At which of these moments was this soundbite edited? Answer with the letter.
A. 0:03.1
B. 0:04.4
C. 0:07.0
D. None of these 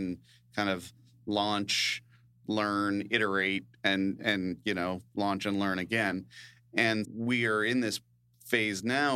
C